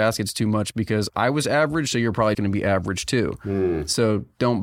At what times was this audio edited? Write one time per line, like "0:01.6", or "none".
0:02.3